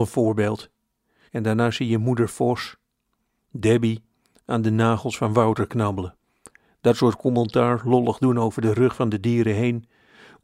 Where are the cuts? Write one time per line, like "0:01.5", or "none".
0:01.3